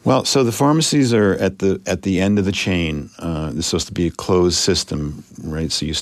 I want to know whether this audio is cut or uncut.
uncut